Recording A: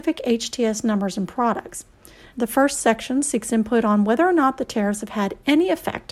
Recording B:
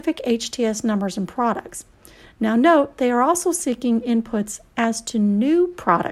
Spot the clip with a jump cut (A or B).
A